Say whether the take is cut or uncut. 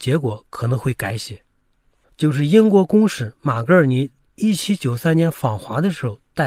cut